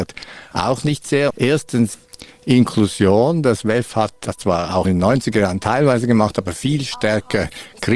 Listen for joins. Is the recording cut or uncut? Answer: cut